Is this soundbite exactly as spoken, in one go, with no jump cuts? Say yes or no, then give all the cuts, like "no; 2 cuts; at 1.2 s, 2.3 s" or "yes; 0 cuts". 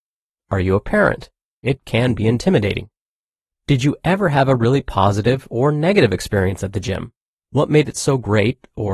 no; 1 cut; at 1.6 s